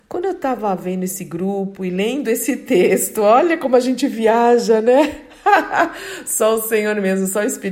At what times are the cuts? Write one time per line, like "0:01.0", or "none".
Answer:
none

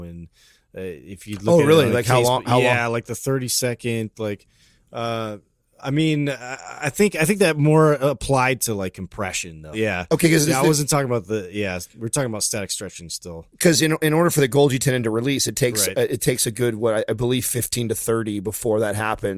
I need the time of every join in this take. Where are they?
0:09.7

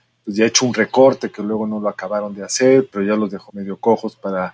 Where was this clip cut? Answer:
0:03.5

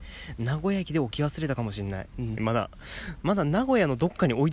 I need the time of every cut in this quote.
0:02.4

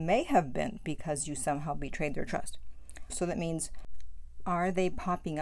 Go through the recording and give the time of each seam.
0:03.1

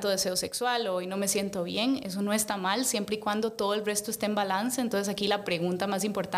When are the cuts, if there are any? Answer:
none

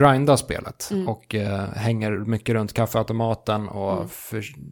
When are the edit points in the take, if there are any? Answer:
none

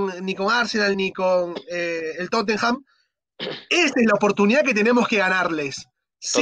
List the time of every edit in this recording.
0:00.9

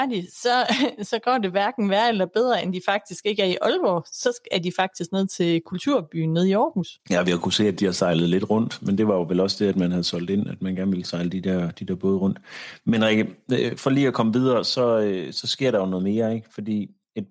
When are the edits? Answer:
none

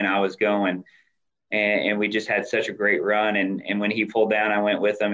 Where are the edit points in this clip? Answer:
none

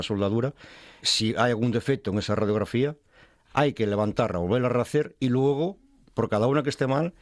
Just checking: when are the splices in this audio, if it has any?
0:01.0

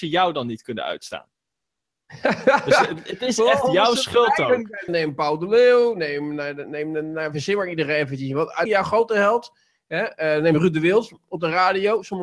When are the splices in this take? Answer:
0:04.9
0:08.7

